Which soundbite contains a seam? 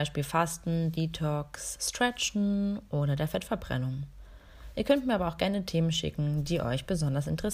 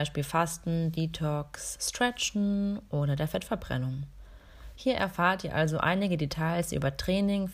second; 1 cut; at 4.7 s

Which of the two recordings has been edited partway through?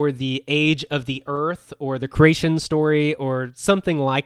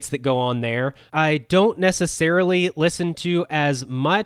second; 1 cut; at 1.1 s

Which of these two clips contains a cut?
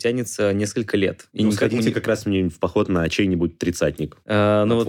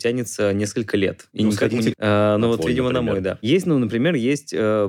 second; 1 cut; at 1.9 s

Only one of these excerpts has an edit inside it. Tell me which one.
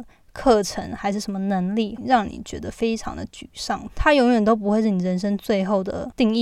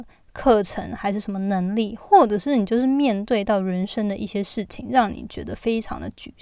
first; 2 cuts; at 2.0 s, 3.9 s

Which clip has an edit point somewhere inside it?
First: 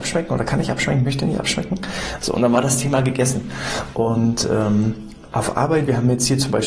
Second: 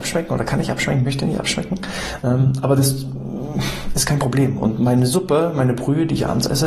first; 1 cut; at 2.2 s

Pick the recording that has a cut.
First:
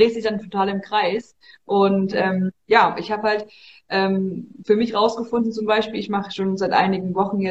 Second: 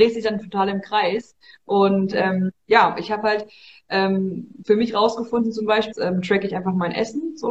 second; 1 cut; at 5.9 s

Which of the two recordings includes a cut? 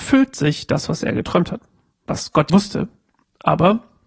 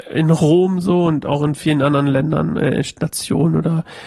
first; 1 cut; at 2.5 s

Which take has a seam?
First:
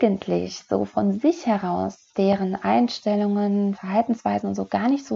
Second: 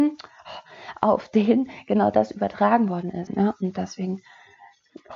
second; 1 cut; at 3.3 s

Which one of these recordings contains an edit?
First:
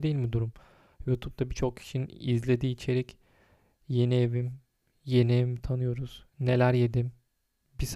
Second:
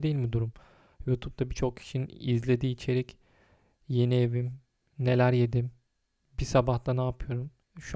second; 1 cut; at 4.9 s

